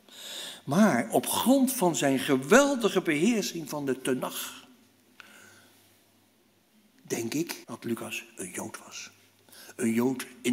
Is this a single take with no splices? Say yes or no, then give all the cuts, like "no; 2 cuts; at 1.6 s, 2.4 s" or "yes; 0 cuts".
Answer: no; 1 cut; at 7.6 s